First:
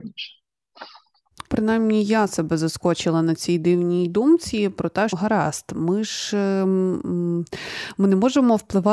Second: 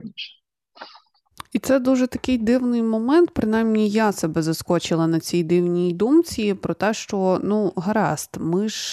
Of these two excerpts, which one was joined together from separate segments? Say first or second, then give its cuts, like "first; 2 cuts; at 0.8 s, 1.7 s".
first; 2 cuts; at 1.5 s, 5.1 s